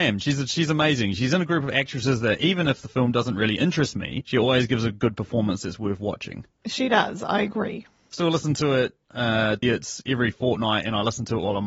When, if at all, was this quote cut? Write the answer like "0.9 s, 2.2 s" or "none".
8.1 s, 9.6 s